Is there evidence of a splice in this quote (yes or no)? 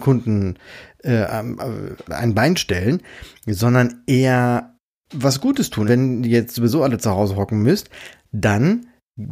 yes